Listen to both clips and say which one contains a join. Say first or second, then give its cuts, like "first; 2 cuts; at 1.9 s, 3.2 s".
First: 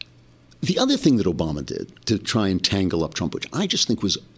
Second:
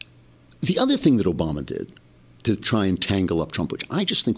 first; 1 cut; at 2.0 s